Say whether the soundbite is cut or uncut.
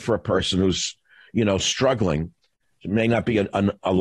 uncut